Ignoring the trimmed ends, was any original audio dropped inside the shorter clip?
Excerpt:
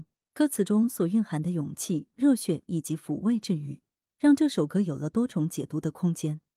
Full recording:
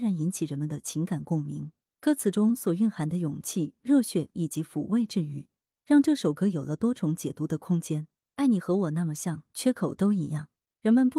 no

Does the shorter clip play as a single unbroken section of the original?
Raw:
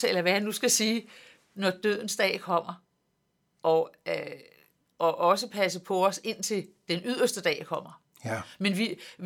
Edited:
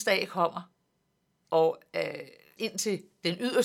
no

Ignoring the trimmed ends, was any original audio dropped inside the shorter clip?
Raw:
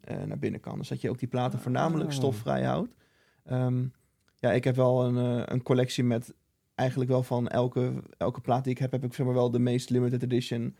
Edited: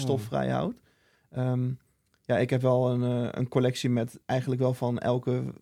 yes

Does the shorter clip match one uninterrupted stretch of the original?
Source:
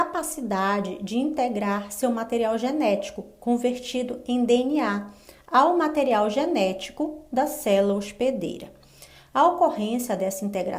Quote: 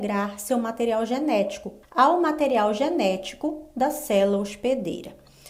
no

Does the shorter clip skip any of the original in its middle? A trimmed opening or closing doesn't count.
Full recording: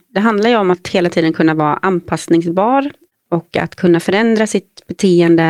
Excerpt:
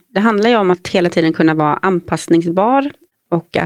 no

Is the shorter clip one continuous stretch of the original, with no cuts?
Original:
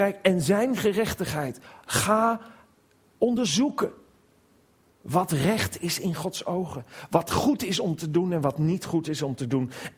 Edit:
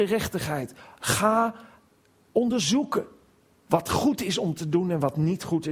no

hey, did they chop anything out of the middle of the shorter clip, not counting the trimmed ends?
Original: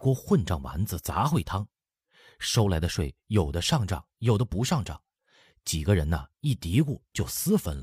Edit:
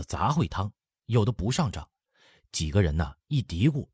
yes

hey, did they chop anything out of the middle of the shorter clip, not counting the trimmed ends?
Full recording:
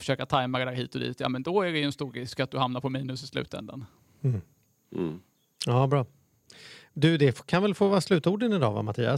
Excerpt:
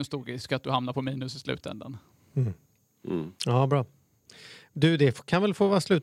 yes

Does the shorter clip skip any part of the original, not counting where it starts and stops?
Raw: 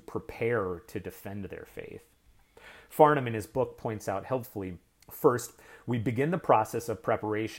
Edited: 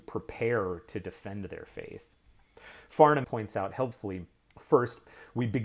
yes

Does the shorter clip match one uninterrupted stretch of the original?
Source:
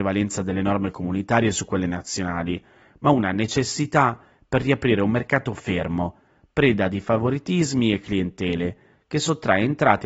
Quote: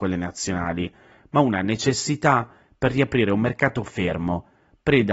yes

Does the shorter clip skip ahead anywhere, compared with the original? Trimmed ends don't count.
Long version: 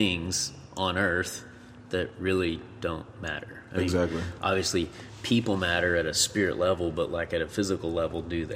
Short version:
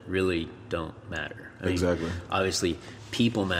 no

